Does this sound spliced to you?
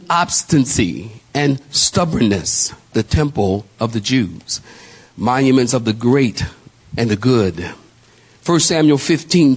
yes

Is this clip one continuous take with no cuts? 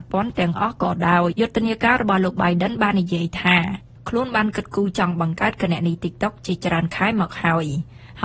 no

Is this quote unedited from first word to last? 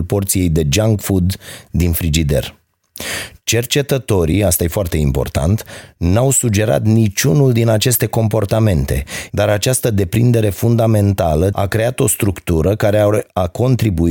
no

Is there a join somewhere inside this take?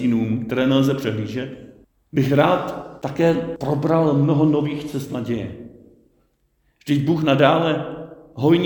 no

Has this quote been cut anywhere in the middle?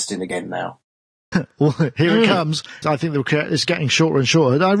yes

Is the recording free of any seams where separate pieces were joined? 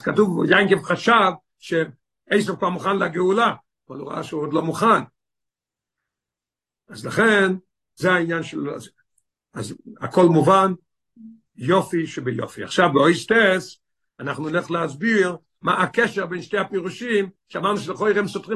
yes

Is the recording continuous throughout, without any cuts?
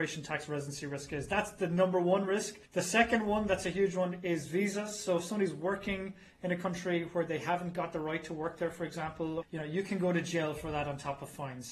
no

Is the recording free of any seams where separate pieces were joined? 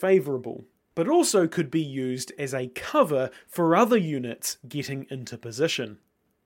yes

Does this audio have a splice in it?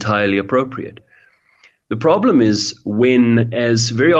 no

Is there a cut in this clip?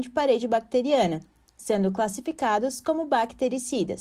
no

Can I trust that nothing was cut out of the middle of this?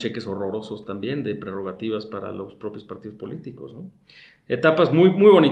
yes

